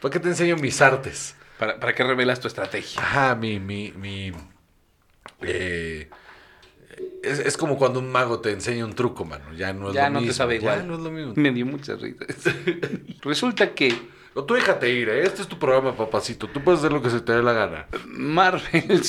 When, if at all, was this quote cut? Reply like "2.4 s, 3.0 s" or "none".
11.3 s, 13.2 s

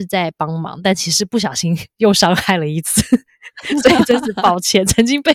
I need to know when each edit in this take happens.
none

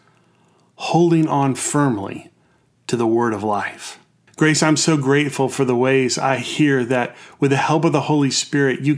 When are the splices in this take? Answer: 4.3 s

